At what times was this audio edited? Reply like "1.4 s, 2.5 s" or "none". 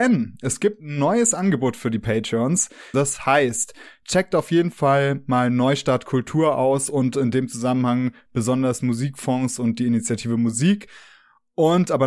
2.9 s